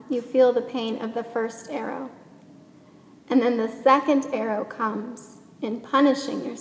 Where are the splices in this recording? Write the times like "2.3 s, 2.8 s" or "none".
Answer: none